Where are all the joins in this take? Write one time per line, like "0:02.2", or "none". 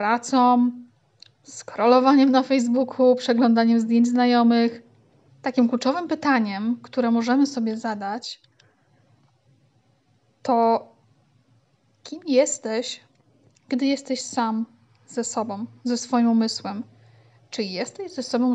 0:05.3